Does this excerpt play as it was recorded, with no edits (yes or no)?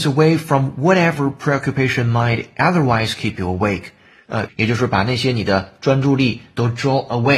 no